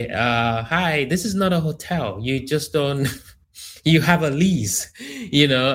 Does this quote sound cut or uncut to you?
uncut